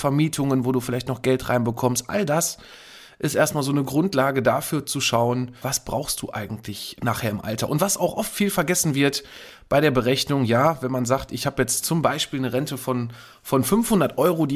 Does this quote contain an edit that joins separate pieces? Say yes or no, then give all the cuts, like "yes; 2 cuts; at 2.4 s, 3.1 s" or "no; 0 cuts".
yes; 1 cut; at 5.6 s